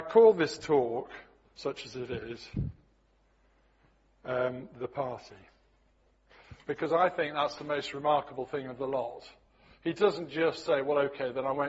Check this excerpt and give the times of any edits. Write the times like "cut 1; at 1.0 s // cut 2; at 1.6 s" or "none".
none